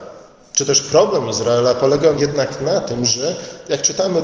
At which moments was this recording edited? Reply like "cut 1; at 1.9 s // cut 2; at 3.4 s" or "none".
cut 1; at 2.1 s